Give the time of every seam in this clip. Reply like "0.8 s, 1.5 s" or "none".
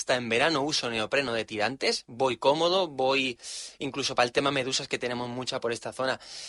none